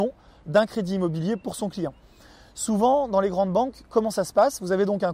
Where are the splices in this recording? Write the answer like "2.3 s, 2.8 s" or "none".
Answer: none